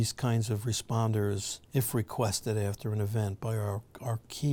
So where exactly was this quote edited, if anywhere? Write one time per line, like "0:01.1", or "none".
0:01.6